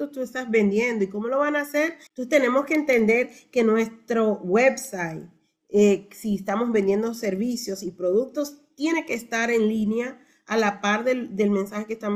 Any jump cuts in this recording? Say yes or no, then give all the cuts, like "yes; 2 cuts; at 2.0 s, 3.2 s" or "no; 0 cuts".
yes; 1 cut; at 2.1 s